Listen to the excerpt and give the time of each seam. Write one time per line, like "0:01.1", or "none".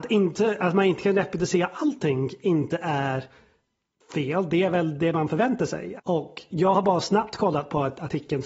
0:06.0